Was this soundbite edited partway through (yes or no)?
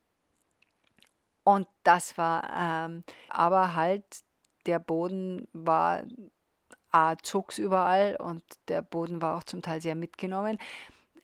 yes